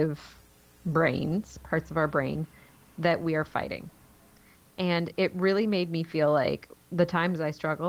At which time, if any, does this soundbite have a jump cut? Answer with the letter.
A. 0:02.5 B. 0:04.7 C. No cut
C